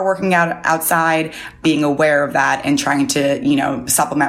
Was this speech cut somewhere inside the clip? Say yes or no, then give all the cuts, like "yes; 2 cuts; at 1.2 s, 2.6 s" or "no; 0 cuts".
yes; 1 cut; at 1.6 s